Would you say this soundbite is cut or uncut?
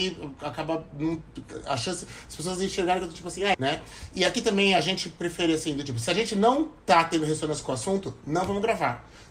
cut